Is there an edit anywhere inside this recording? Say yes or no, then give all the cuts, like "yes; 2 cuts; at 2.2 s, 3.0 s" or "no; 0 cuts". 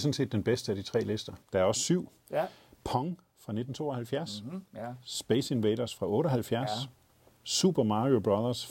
yes; 1 cut; at 1.4 s